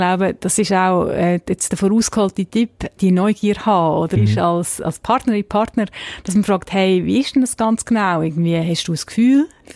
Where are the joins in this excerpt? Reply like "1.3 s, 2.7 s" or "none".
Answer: 3.0 s, 4.2 s